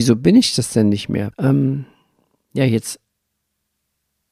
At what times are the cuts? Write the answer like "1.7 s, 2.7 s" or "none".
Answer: 1.3 s